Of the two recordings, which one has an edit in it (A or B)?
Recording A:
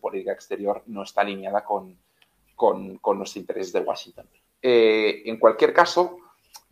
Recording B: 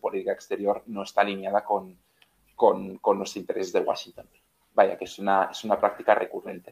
A